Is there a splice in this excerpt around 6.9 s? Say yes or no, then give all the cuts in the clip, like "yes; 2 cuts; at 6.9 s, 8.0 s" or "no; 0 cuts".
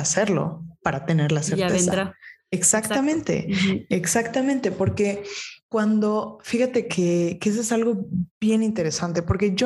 yes; 1 cut; at 6.9 s